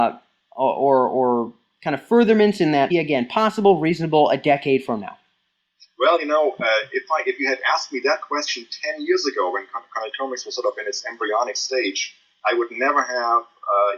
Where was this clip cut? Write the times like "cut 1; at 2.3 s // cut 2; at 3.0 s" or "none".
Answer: cut 1; at 2.9 s